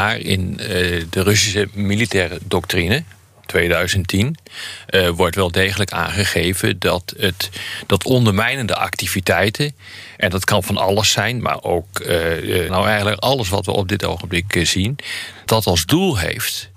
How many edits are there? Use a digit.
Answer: 3